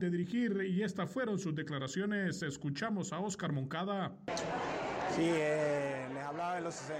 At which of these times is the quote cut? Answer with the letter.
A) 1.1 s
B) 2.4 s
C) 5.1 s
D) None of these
D